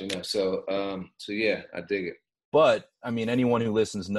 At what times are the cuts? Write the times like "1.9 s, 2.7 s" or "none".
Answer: 2.3 s